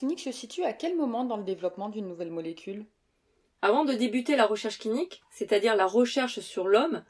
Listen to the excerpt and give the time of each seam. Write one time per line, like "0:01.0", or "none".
none